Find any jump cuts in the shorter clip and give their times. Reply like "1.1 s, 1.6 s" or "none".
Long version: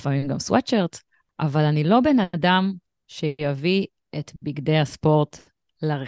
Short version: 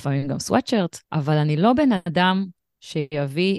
1.0 s